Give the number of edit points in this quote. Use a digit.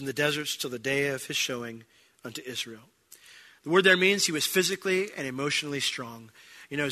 0